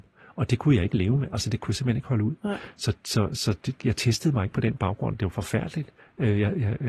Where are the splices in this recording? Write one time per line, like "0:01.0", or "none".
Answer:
0:03.8